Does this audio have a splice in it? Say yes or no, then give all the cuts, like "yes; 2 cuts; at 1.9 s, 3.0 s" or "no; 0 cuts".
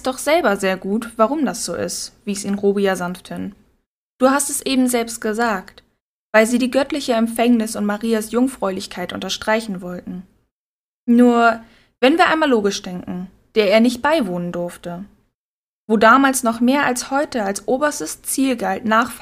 yes; 1 cut; at 13.5 s